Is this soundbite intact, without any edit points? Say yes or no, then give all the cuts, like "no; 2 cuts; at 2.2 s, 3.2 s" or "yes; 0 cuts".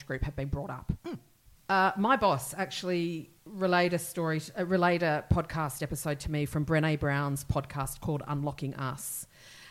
no; 2 cuts; at 1.6 s, 3.4 s